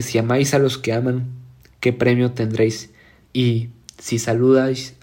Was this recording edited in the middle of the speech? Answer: yes; 1 cut; at 3.2 s

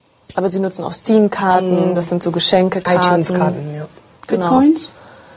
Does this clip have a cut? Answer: no; 0 cuts

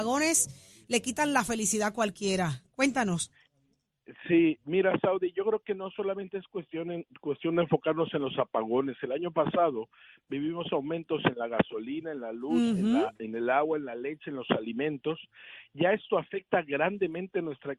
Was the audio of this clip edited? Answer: no; 0 cuts

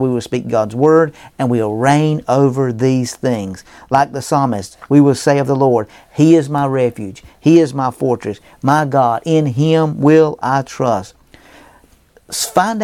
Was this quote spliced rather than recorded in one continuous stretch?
no; 0 cuts

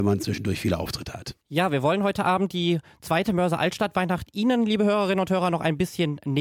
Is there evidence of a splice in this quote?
yes; 1 cut; at 1.4 s

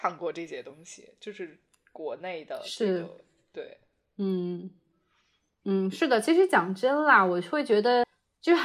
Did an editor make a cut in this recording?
no; 0 cuts

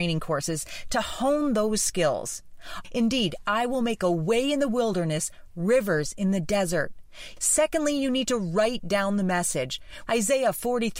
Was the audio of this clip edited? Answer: yes; 3 cuts; at 2.8 s, 7.4 s, 10.1 s

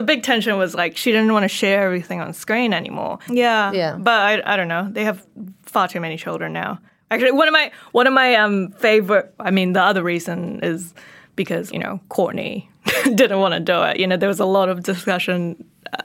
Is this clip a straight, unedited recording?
no; 3 cuts; at 3.3 s, 9.4 s, 11.7 s

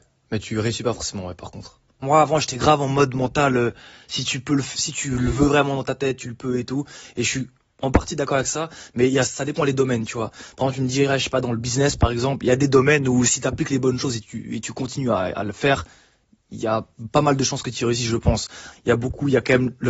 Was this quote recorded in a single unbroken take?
no; 2 cuts; at 2.0 s, 18.7 s

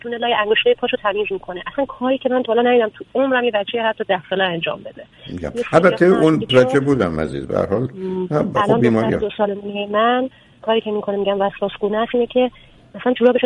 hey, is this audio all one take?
no; 1 cut; at 6.5 s

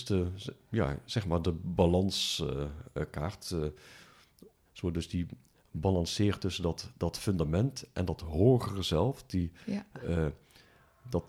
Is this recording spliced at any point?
no; 0 cuts

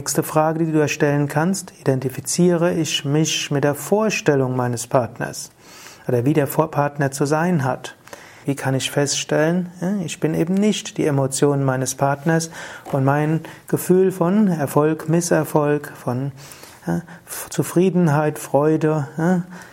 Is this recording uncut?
no; 1 cut; at 8.4 s

